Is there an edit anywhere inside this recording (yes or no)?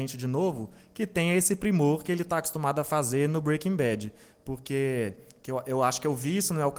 no